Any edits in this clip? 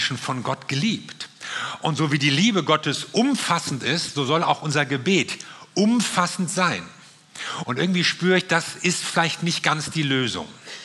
yes; 1 cut; at 7.6 s

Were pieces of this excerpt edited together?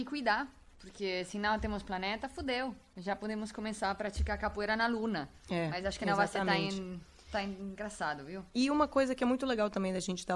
no; 0 cuts

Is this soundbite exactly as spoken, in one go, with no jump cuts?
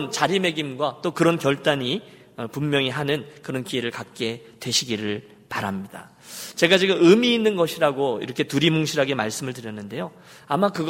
yes; 0 cuts

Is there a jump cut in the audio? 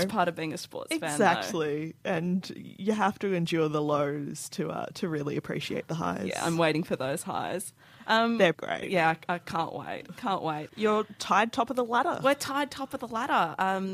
yes; 2 cuts; at 8.5 s, 10.7 s

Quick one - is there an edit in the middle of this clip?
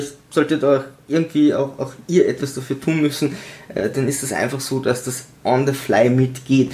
no; 0 cuts

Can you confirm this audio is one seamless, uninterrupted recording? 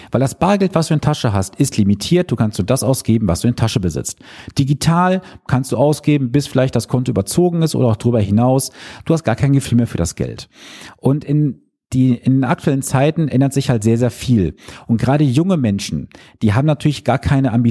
yes; 0 cuts

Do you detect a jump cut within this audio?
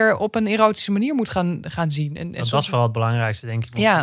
no; 0 cuts

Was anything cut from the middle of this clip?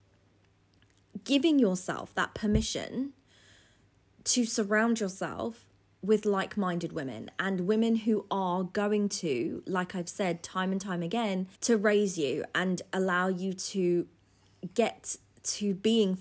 yes; 1 cut; at 11.5 s

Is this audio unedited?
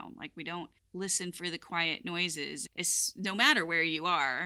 no; 1 cut; at 2.7 s

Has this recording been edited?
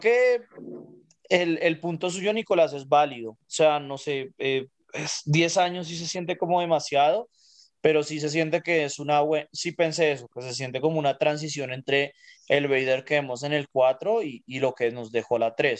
no; 0 cuts

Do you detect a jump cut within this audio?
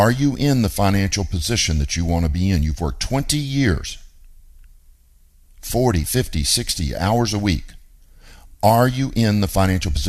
no; 0 cuts

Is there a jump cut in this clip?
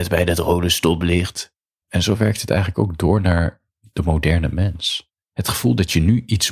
yes; 2 cuts; at 1.8 s, 5.2 s

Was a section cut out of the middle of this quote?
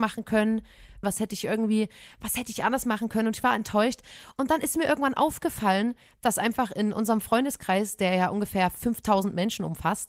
yes; 1 cut; at 1.0 s

